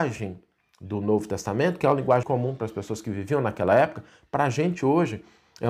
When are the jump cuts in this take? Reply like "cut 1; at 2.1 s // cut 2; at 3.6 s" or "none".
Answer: cut 1; at 2.2 s